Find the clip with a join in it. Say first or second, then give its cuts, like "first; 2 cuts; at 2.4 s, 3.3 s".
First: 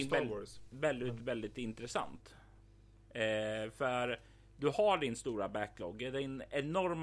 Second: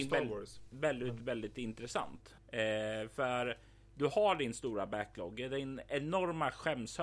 second; 1 cut; at 2.4 s